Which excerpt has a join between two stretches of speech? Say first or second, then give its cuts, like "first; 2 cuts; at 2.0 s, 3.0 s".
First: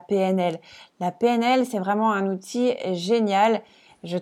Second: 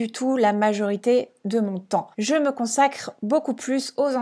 second; 1 cut; at 2.1 s